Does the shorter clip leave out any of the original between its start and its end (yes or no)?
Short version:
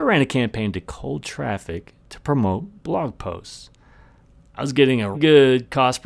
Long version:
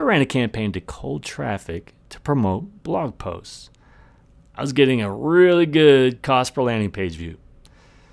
yes